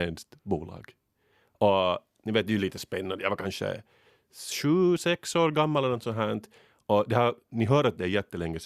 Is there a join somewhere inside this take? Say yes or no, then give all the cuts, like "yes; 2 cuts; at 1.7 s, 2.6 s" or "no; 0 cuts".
no; 0 cuts